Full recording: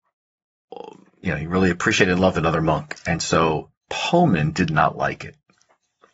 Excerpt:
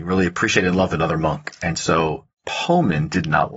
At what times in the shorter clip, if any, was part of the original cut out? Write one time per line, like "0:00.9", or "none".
none